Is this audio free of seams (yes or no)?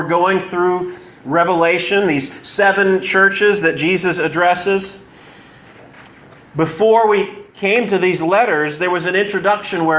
yes